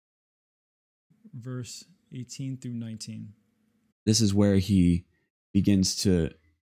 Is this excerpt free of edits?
no; 1 cut; at 3.9 s

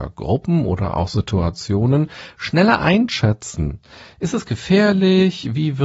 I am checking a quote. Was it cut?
no; 0 cuts

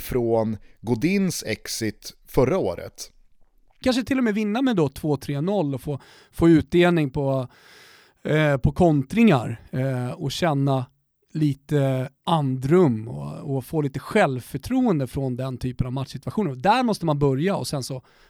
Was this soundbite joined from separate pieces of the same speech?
yes; 1 cut; at 3.8 s

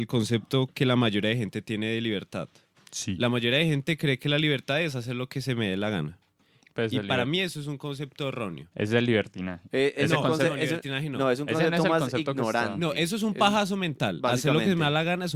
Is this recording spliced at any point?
no; 0 cuts

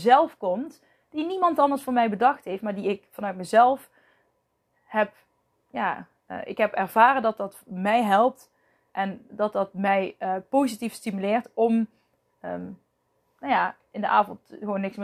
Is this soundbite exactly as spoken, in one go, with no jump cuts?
yes; 0 cuts

